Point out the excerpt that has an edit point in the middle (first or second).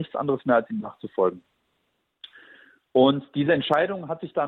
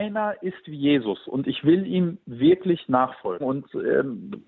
second